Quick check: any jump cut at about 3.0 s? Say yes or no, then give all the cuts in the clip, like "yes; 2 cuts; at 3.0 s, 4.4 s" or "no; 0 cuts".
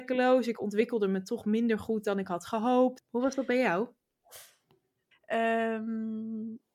yes; 2 cuts; at 3.0 s, 5.1 s